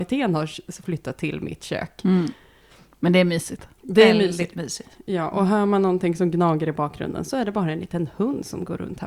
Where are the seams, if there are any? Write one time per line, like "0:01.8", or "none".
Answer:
none